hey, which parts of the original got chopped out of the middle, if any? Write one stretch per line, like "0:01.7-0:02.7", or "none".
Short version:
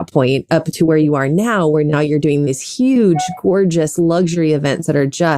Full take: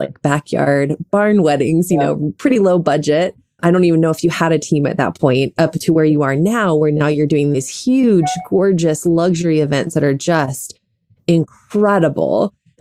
none